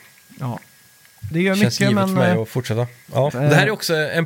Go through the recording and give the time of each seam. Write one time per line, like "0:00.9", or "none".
0:01.3
0:03.3